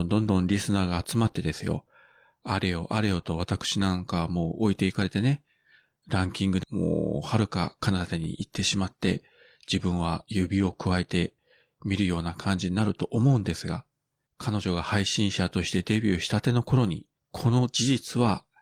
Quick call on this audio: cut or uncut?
cut